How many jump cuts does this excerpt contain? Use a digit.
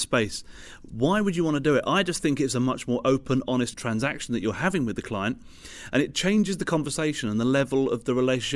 0